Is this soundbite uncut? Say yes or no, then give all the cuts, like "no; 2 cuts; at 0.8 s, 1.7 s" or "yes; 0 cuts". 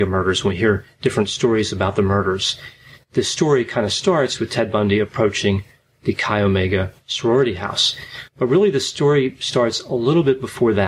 yes; 0 cuts